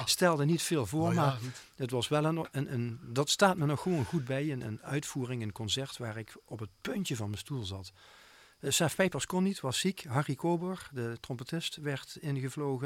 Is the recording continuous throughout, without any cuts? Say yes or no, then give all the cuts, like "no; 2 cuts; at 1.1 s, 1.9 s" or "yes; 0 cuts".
yes; 0 cuts